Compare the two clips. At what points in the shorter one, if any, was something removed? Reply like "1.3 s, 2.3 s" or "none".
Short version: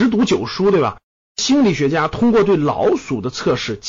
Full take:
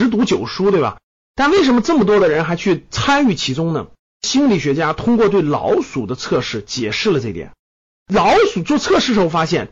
1.2 s